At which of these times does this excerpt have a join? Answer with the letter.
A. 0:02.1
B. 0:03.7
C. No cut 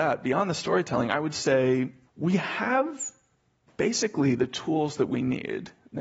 A